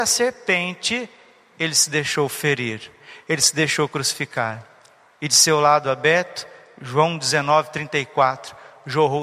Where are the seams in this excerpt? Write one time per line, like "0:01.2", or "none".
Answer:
none